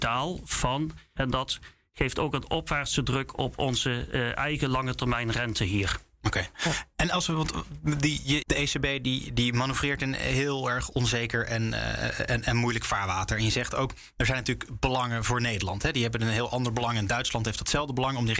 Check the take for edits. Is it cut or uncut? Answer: cut